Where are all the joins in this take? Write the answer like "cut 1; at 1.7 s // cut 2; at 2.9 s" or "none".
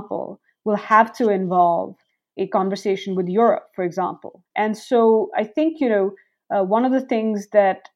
cut 1; at 4.5 s